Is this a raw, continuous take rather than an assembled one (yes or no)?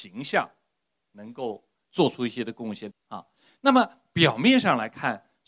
no